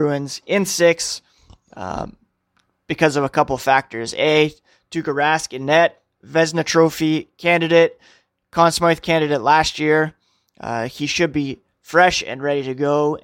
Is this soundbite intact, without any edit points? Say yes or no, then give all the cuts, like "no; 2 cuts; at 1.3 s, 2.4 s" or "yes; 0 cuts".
yes; 0 cuts